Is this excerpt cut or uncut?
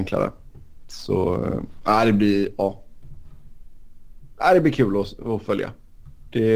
uncut